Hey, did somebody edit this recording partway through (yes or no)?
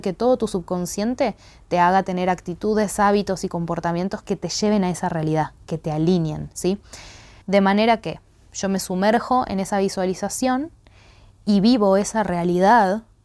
yes